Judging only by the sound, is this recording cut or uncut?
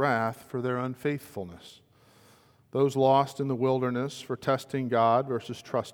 uncut